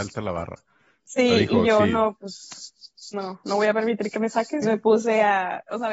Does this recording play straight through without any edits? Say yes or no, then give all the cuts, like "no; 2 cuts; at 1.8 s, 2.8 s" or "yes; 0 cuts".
no; 1 cut; at 4.6 s